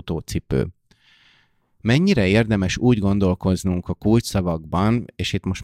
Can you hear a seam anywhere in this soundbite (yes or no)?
no